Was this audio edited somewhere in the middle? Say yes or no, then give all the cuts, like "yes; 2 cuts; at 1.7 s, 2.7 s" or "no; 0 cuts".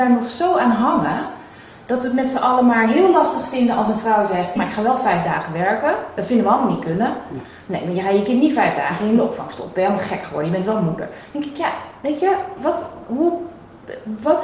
yes; 1 cut; at 4.6 s